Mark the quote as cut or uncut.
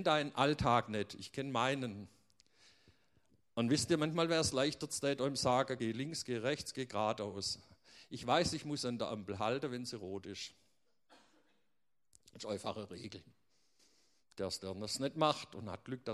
uncut